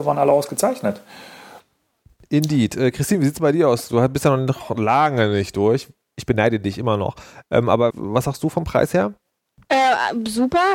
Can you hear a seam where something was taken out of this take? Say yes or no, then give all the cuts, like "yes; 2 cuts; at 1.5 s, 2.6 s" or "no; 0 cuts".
yes; 2 cuts; at 1.6 s, 7.9 s